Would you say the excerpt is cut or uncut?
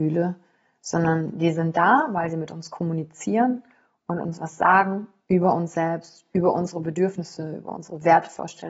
uncut